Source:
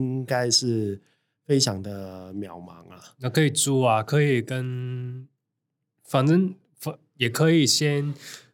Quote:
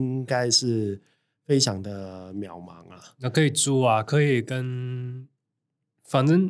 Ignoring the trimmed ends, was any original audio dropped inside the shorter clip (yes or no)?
no